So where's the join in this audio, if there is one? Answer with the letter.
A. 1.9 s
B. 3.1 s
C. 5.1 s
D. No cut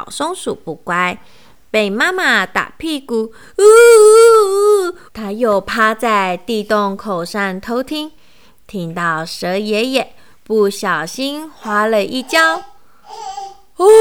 C